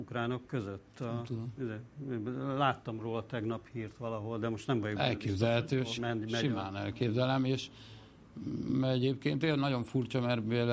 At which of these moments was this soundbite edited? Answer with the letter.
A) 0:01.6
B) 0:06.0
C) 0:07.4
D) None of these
B